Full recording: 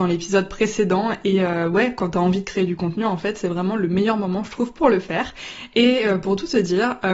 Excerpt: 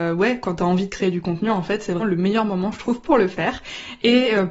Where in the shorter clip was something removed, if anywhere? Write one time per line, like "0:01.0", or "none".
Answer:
0:02.0